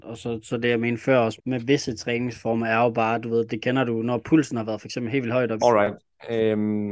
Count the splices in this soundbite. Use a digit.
3